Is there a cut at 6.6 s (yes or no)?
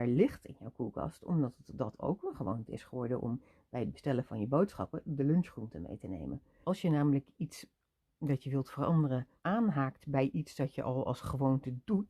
yes